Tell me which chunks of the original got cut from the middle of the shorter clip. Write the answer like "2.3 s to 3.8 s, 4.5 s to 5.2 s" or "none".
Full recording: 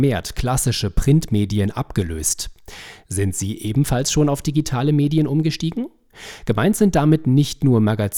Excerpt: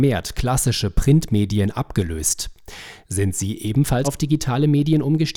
4.0 s to 4.3 s

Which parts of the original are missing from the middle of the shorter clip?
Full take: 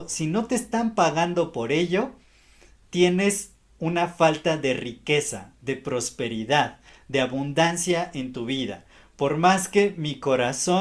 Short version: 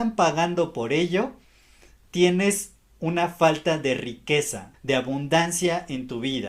5.5 s to 7.0 s

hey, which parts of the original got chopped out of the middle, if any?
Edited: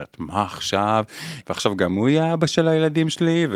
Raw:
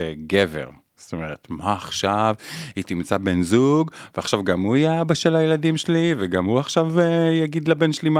2.7 s to 4.1 s

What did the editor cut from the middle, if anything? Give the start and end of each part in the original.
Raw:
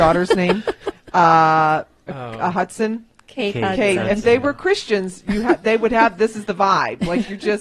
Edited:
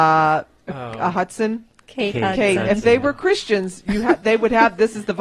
none

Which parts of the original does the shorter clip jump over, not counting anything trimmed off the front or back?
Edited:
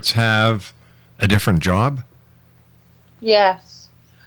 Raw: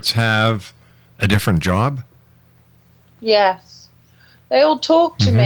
none

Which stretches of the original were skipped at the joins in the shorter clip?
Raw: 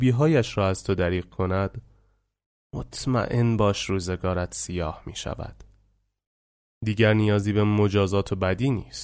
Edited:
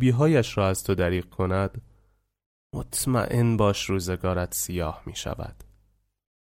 none

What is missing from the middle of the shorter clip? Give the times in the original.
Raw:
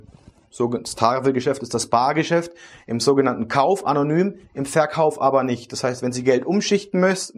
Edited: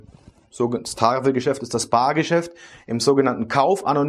none

